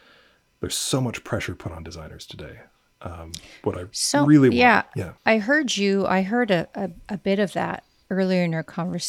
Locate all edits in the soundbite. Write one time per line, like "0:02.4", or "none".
0:05.2

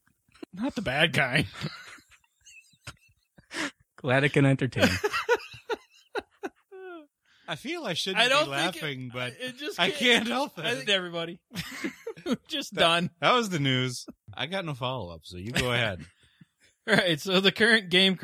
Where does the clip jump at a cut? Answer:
0:10.9

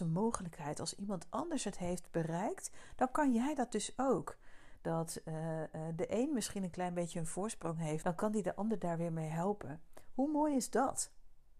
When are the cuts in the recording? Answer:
0:04.8
0:08.0

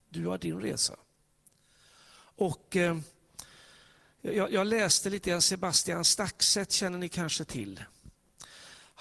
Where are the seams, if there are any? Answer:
none

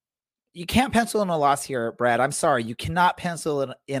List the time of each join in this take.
none

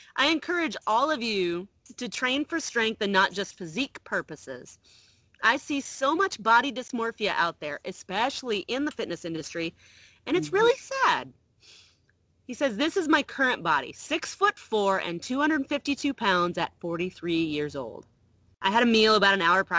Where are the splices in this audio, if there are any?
none

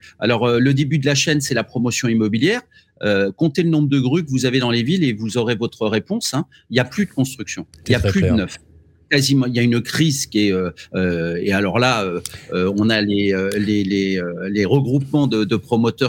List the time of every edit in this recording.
none

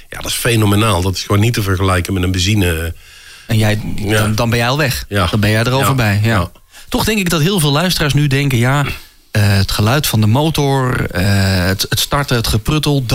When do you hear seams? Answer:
0:03.5

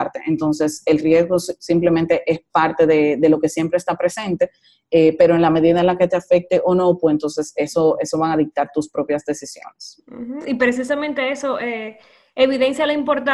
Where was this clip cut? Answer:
none

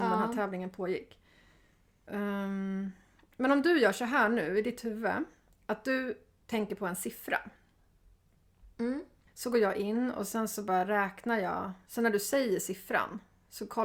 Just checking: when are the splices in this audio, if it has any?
none

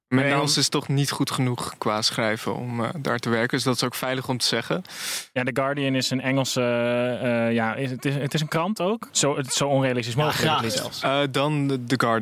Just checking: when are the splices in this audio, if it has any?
0:09.1

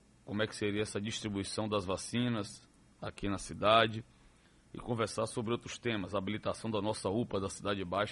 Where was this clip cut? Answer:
none

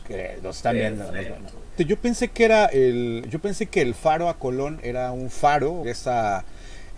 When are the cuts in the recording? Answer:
0:01.8
0:05.8

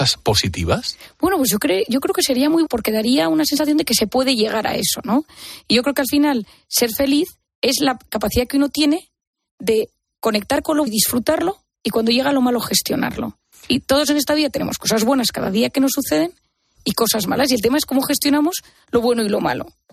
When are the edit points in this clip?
0:02.7
0:10.9

